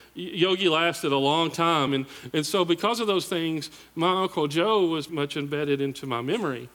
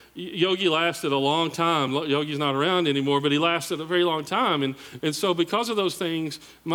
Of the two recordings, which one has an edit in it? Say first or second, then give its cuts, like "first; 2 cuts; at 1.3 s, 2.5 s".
first; 2 cuts; at 1.9 s, 5.1 s